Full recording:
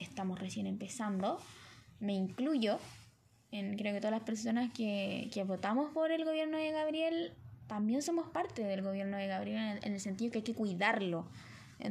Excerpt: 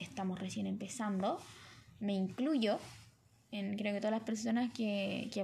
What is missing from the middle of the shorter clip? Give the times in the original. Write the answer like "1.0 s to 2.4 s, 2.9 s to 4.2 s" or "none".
none